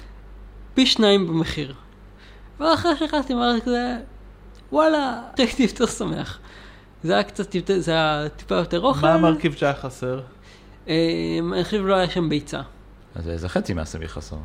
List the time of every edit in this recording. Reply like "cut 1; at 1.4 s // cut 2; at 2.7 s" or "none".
cut 1; at 5.4 s // cut 2; at 13.0 s

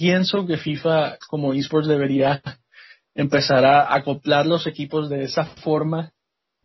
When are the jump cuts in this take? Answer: none

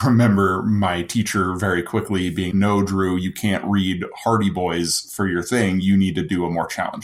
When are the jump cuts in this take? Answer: cut 1; at 2.5 s

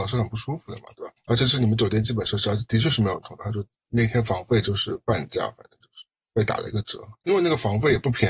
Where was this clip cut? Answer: none

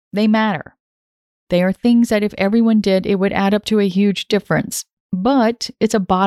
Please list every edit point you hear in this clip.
none

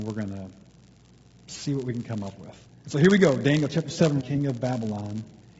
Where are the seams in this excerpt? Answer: cut 1; at 2.7 s // cut 2; at 4.2 s

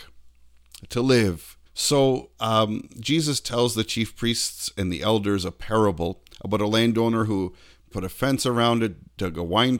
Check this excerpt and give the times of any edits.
cut 1; at 1.7 s // cut 2; at 7.9 s

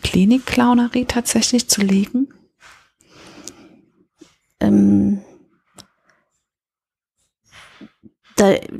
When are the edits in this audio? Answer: none

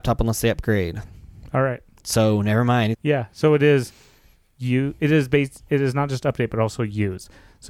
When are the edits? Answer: cut 1; at 2.9 s

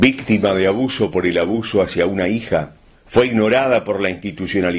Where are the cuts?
cut 1; at 3.0 s

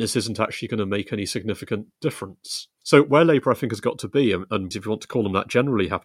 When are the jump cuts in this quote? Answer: cut 1; at 2.8 s // cut 2; at 4.7 s

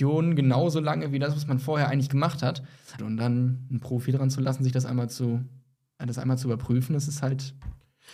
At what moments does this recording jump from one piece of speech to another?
cut 1; at 3.0 s // cut 2; at 6.0 s

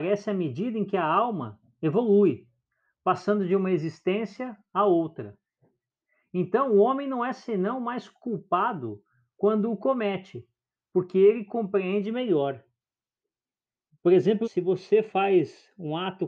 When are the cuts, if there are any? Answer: cut 1; at 14.4 s

